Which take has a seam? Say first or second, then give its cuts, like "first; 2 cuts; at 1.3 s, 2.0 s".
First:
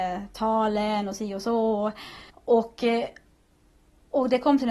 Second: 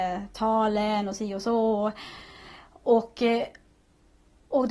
first; 1 cut; at 2.3 s